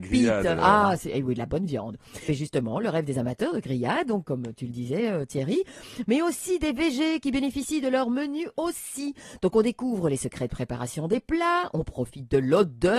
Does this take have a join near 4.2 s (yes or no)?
yes